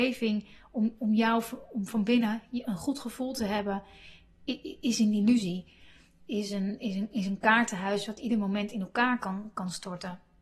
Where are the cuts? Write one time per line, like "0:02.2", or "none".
none